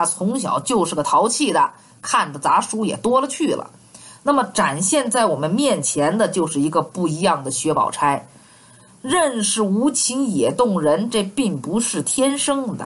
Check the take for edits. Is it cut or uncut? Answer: uncut